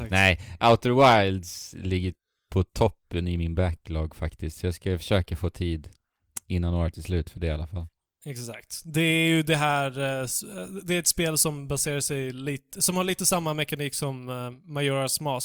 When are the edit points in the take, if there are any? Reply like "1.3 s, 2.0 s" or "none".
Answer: none